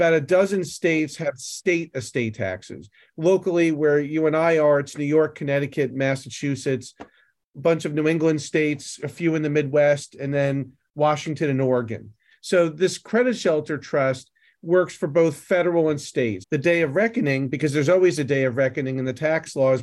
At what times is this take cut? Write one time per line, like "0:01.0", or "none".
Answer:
0:12.3
0:16.4